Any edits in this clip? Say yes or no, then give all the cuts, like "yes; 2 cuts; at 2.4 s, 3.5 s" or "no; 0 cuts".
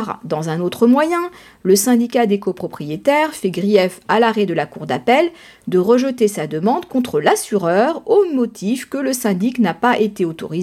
no; 0 cuts